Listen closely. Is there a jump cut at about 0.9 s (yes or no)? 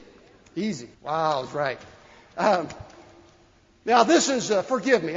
yes